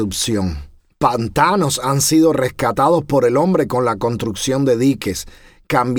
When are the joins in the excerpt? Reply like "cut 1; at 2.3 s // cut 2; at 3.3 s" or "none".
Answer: none